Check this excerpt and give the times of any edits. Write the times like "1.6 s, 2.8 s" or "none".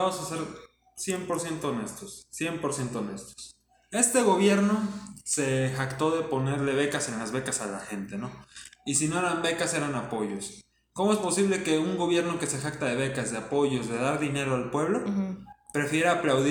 none